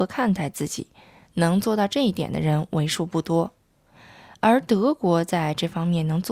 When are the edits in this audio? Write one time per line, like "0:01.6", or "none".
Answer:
none